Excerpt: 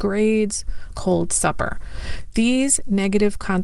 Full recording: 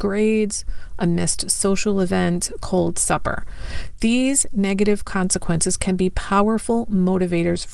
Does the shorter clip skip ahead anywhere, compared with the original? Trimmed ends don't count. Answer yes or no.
yes